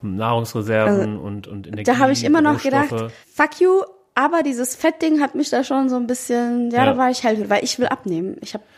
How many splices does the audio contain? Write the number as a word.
one